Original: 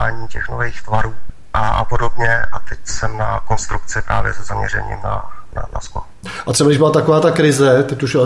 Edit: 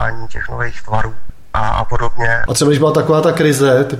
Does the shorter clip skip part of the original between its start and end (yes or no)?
yes